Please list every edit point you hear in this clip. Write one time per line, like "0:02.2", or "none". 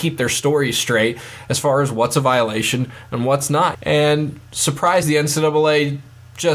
0:03.7
0:05.0